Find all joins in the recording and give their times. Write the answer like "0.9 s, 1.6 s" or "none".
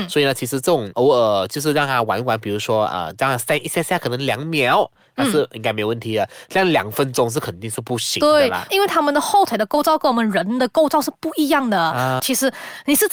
8.7 s, 12.2 s